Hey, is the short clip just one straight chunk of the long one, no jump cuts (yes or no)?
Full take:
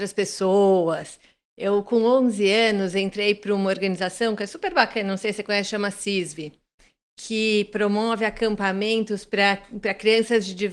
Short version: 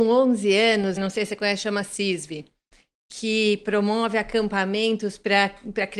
no